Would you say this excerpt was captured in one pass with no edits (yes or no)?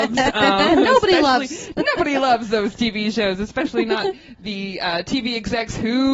yes